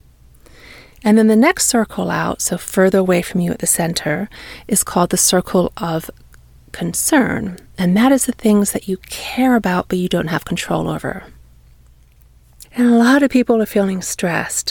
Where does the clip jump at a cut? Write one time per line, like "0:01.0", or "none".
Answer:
0:12.7